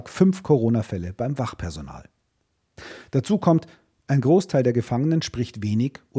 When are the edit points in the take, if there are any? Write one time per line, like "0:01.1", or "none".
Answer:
none

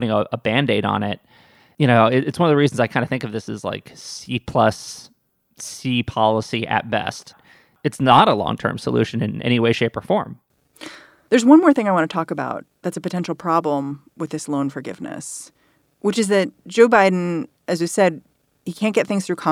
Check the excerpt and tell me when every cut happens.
none

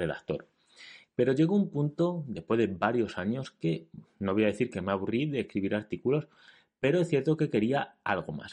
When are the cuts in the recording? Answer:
0:01.0

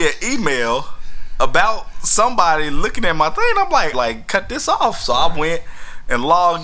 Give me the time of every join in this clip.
0:03.9

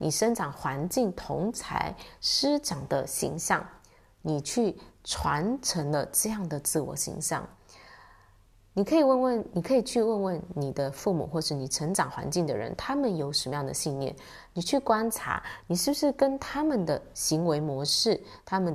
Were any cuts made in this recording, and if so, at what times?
none

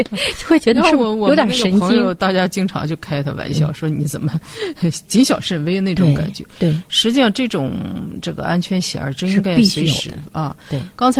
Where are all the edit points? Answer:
none

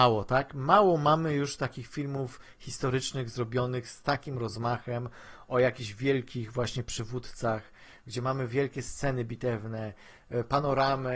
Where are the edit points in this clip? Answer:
none

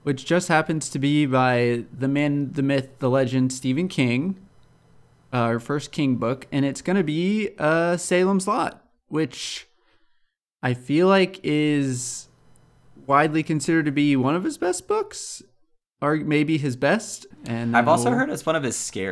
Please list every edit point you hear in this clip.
0:17.3

